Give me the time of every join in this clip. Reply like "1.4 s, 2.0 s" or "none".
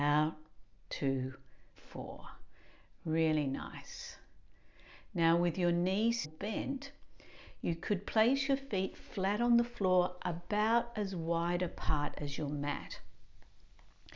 1.7 s, 6.2 s